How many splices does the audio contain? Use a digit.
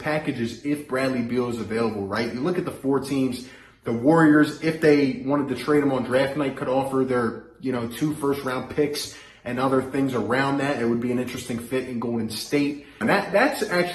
1